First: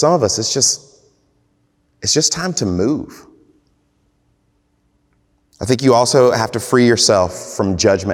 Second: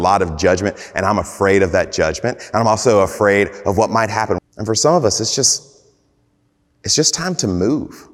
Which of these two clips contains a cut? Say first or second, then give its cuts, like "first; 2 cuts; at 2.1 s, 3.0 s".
second; 1 cut; at 4.4 s